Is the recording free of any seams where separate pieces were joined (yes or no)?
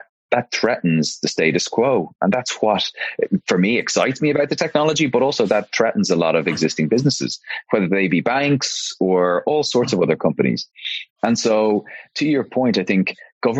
yes